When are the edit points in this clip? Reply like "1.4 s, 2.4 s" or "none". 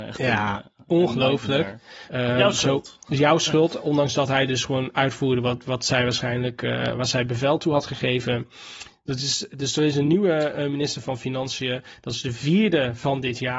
2.1 s